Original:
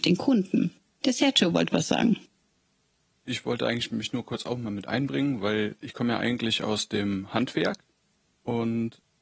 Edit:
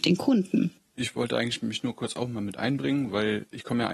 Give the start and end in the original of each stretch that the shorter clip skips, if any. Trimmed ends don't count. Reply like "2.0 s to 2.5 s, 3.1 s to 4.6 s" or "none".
0.9 s to 3.2 s